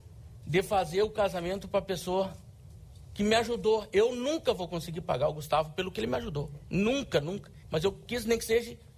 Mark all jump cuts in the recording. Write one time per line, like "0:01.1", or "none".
0:07.6